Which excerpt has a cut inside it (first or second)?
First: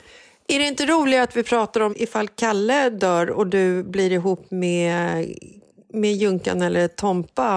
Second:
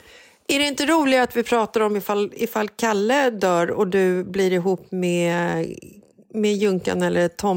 first